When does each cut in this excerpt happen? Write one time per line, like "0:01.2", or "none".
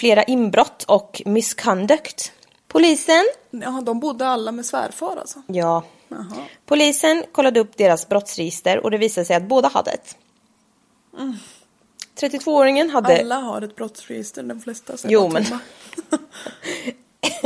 0:02.6

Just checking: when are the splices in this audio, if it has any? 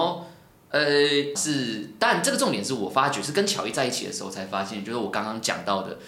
0:01.3

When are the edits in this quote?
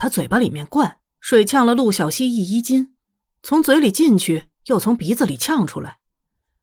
0:01.1

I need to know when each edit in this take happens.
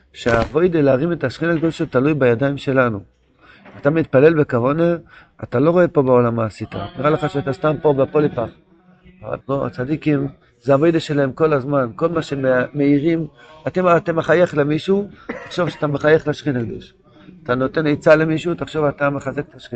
0:09.4

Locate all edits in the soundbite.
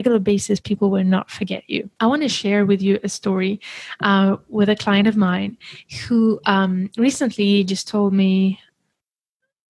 0:01.9

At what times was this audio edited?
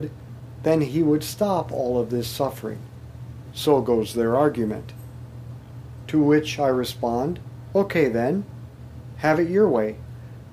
none

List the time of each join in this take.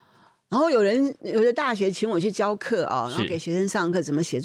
0:01.2

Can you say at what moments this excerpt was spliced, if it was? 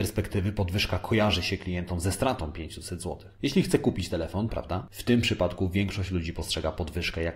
0:04.5

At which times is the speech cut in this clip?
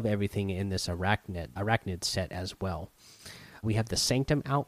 0:01.6
0:03.6

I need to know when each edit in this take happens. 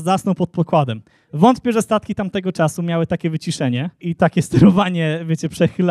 0:04.0

